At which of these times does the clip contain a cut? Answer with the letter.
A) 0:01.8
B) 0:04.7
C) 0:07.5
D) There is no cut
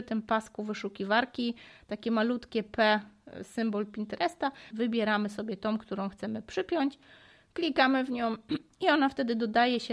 B